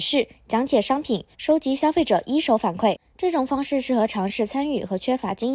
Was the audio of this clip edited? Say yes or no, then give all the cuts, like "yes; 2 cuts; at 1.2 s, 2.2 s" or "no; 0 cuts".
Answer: yes; 2 cuts; at 1.3 s, 3.1 s